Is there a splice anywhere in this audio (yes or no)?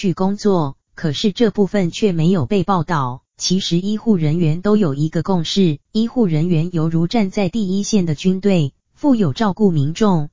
yes